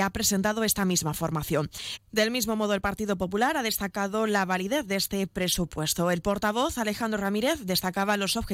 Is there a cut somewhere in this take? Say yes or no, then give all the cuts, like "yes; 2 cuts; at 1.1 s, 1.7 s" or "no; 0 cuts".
yes; 1 cut; at 2.0 s